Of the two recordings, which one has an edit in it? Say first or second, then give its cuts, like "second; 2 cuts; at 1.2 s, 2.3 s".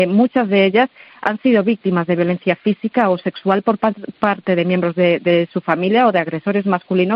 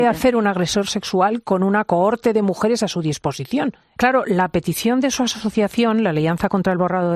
second; 1 cut; at 4.0 s